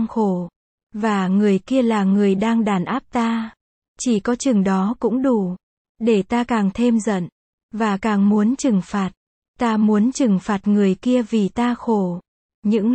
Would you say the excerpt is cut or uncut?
uncut